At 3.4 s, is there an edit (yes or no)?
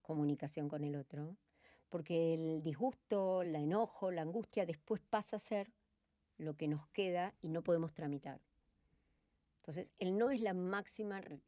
no